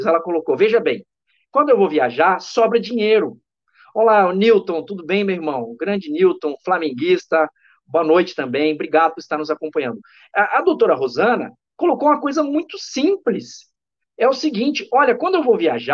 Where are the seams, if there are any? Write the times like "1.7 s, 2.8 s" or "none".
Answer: none